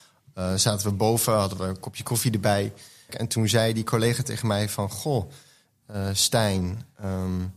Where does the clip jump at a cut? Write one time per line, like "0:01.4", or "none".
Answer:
0:03.1